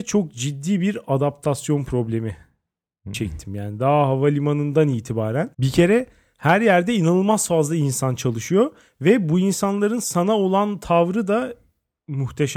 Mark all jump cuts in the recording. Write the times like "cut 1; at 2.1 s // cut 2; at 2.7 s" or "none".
cut 1; at 5.5 s